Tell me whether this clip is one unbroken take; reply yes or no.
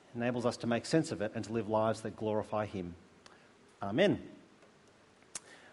yes